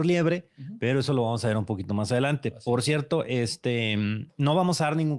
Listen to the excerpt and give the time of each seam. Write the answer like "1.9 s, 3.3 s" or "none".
none